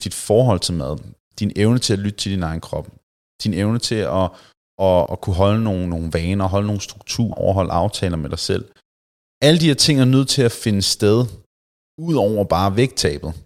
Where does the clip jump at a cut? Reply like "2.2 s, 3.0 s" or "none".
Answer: 5.1 s, 7.3 s